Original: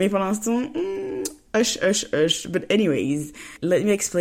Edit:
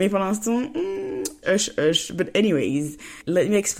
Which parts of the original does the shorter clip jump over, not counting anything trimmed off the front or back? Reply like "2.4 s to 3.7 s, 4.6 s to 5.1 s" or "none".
1.4 s to 1.8 s